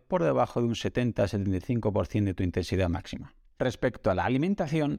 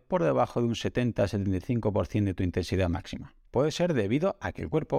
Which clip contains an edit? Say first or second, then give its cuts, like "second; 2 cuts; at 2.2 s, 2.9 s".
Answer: second; 1 cut; at 3.5 s